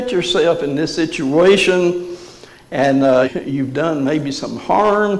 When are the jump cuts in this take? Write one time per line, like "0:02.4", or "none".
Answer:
0:03.2